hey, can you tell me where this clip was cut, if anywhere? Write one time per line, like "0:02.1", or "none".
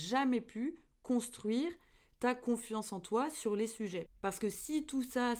0:04.1